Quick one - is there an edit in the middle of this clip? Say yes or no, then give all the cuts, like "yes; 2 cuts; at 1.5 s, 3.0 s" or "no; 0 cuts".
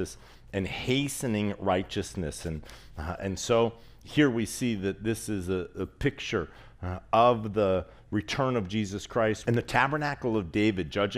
yes; 1 cut; at 9.4 s